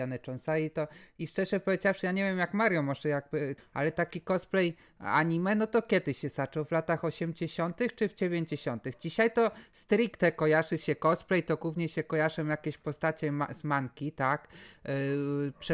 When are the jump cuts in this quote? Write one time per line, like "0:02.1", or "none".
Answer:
0:03.6